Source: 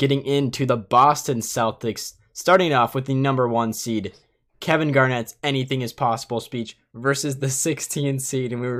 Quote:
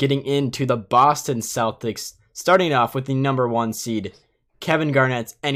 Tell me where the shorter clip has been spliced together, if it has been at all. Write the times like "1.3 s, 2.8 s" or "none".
none